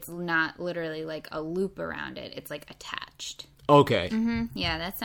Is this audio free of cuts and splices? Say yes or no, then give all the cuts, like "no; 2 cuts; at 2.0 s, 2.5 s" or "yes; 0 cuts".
no; 1 cut; at 4.1 s